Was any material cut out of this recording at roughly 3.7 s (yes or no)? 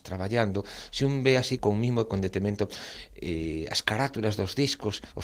no